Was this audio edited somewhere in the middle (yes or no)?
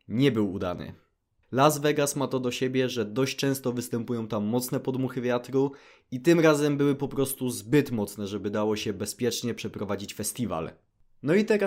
yes